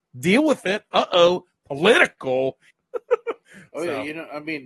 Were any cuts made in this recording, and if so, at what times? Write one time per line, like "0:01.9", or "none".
0:02.7